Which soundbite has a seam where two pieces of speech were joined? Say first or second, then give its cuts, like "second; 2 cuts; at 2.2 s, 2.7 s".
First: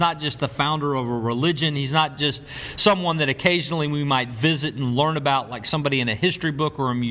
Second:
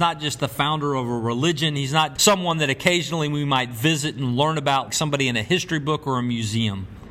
second; 2 cuts; at 2.2 s, 4.9 s